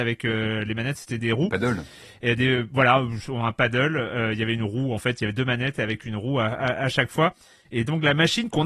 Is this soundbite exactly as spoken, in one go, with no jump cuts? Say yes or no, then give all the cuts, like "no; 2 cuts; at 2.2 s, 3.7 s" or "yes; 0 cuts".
yes; 0 cuts